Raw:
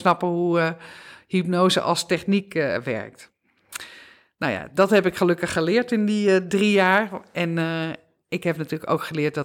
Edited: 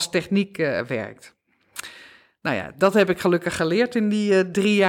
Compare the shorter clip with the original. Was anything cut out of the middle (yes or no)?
no